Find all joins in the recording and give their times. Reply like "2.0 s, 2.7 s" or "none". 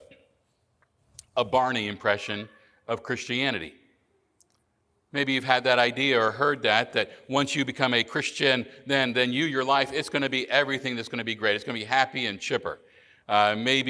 none

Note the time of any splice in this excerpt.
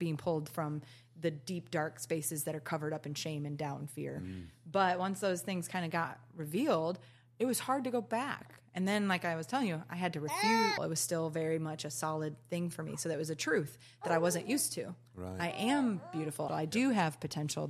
10.8 s, 16.5 s

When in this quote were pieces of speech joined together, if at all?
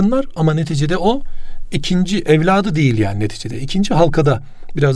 none

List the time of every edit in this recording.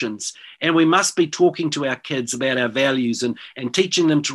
none

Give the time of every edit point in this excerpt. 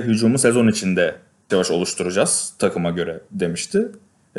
1.5 s

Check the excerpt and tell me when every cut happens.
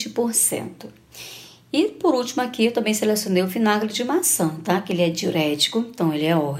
none

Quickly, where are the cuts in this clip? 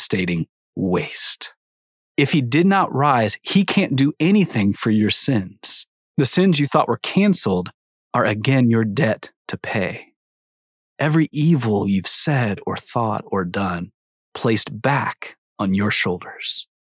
6.0 s

